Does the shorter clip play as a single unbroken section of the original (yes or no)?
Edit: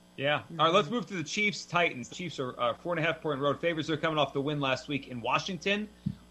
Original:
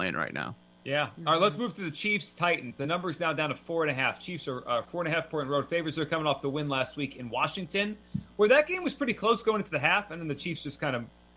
no